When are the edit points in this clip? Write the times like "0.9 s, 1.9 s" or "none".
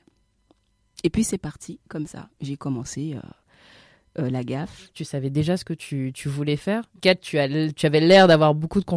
4.9 s, 7.0 s